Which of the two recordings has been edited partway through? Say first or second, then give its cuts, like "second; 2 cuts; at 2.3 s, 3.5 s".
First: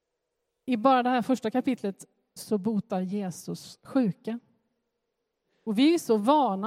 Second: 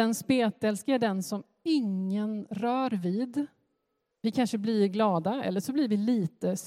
second; 1 cut; at 4.1 s